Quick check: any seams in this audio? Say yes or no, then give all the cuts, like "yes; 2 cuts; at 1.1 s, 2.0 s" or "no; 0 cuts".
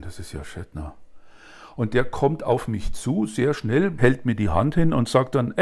yes; 1 cut; at 4.0 s